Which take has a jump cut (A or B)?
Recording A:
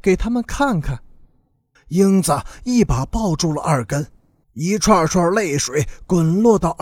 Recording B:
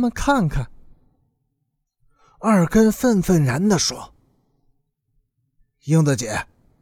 A